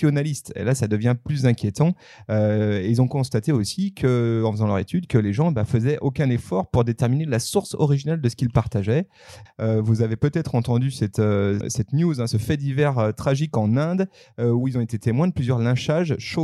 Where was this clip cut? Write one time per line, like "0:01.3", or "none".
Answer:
0:09.5
0:11.6